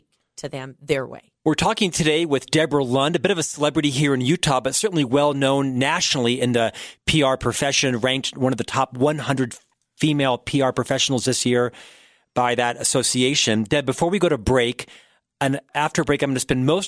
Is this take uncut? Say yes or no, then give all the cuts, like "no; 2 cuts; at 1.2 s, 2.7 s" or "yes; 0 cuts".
yes; 0 cuts